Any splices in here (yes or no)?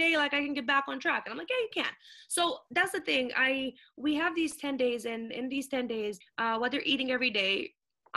yes